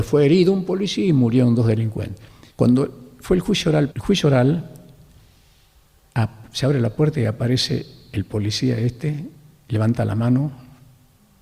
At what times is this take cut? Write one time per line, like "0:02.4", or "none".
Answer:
0:02.5
0:03.9